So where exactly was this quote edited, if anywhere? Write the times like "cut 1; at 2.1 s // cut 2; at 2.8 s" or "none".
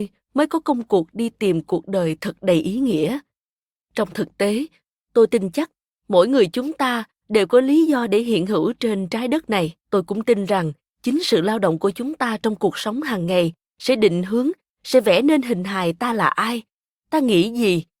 cut 1; at 9.8 s